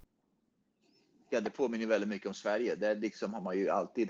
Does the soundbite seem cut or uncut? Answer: uncut